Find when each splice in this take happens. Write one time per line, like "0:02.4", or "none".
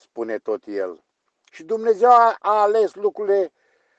0:01.5